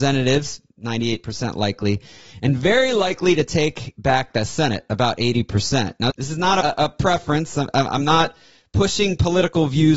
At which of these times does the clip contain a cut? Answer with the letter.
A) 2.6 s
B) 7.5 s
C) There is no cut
C